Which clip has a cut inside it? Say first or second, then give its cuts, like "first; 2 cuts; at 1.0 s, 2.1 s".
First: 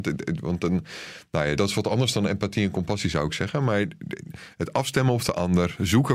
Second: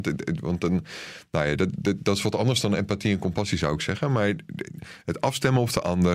first; 1 cut; at 1.6 s